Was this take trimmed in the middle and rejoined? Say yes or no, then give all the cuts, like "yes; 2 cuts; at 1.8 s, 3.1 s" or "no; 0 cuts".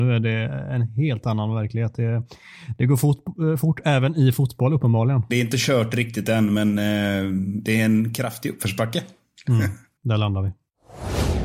yes; 1 cut; at 5.3 s